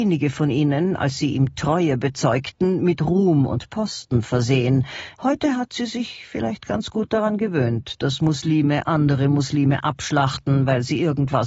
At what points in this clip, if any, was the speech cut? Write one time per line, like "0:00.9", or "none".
0:05.1